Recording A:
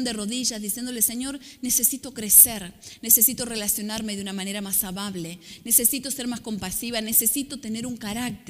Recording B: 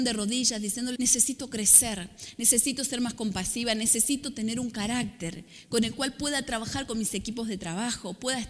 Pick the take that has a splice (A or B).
B